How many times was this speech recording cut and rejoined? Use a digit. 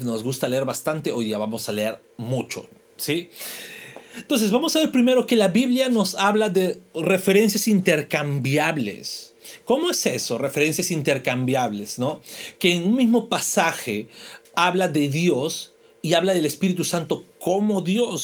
0